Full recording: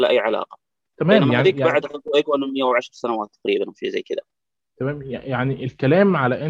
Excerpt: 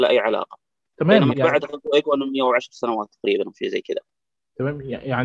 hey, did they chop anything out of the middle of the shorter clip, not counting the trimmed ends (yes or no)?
yes